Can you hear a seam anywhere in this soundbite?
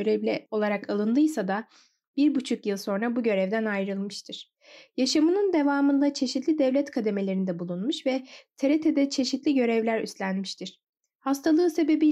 no; 0 cuts

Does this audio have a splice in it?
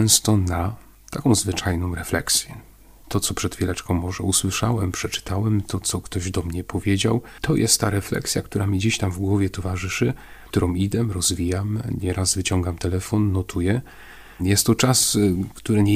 yes; 2 cuts; at 3.0 s, 14.4 s

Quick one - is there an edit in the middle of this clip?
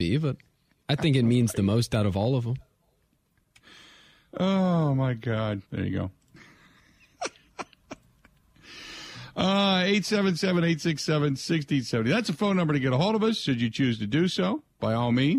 yes; 1 cut; at 5.7 s

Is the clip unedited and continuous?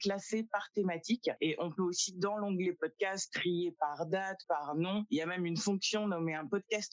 no; 1 cut; at 4.4 s

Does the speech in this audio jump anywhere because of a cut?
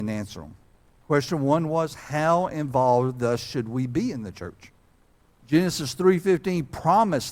yes; 1 cut; at 5.3 s

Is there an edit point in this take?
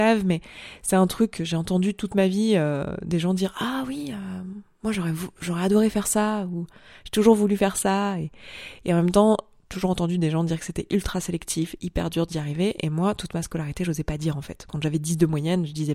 no; 0 cuts

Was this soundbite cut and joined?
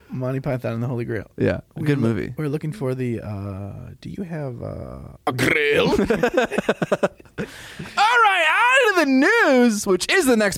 yes; 1 cut; at 1.7 s

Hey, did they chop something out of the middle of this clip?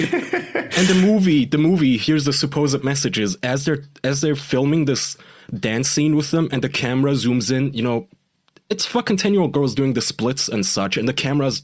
no; 0 cuts

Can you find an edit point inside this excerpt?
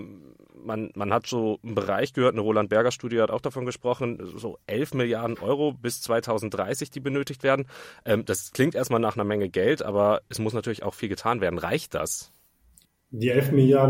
no; 0 cuts

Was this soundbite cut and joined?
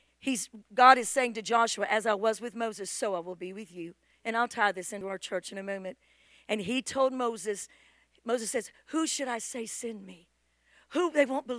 no; 0 cuts

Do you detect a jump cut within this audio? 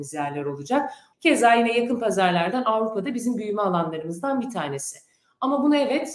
yes; 1 cut; at 1.1 s

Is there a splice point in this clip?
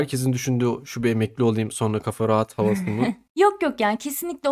no; 0 cuts

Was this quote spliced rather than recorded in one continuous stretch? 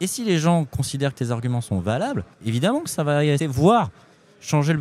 yes; 2 cuts; at 2.3 s, 3.4 s

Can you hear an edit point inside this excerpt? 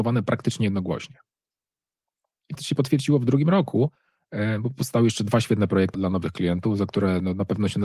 yes; 2 cuts; at 2.6 s, 5.9 s

